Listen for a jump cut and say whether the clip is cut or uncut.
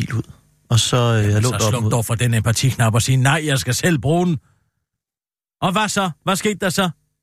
uncut